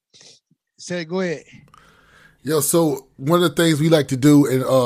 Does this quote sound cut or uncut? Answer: uncut